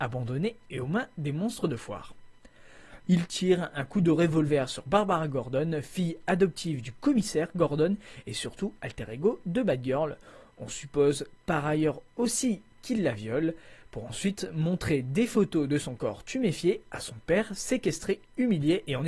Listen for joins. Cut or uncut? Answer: cut